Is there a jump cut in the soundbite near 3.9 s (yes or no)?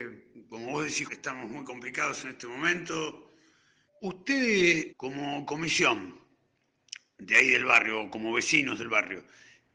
yes